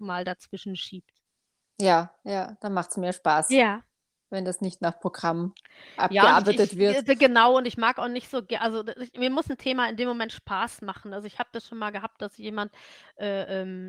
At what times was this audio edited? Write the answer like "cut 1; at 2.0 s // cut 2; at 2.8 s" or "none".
none